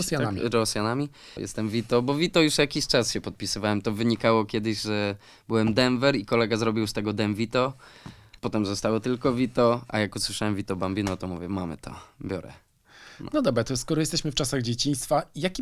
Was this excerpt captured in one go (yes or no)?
no